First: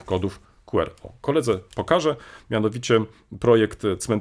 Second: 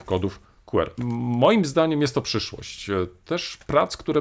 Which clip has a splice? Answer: second; 1 cut; at 1.0 s

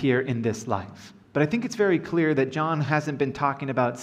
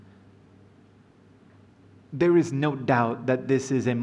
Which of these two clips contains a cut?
first; 1 cut; at 1.2 s

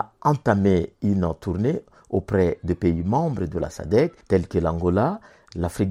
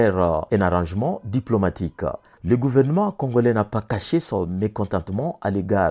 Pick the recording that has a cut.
second; 1 cut; at 2.3 s

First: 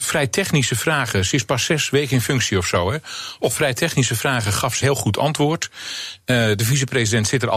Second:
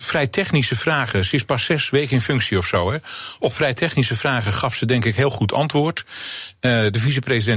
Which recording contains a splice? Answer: first; 1 cut; at 4.8 s

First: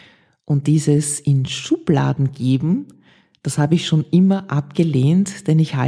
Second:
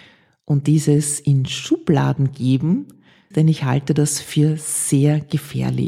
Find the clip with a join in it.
second; 1 cut; at 3.3 s

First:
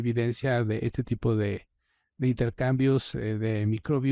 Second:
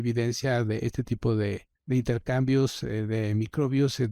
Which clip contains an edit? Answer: second; 1 cut; at 1.7 s

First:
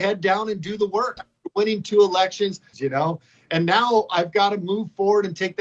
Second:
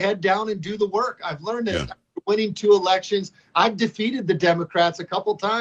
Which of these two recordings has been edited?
first; 2 cuts; at 1.2 s, 2.7 s

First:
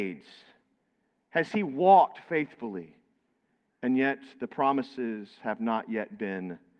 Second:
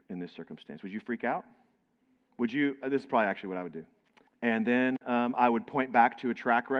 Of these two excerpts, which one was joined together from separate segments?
second; 2 cuts; at 2.3 s, 4.3 s

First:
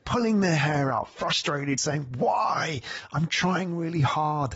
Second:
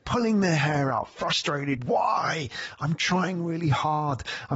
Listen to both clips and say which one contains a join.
second; 1 cut; at 1.8 s

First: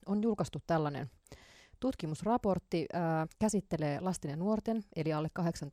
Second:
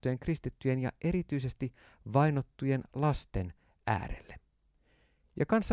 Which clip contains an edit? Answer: first; 1 cut; at 3.2 s

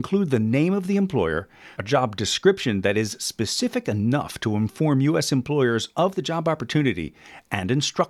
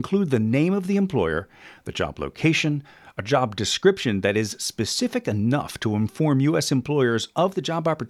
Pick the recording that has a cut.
first; 1 cut; at 1.7 s

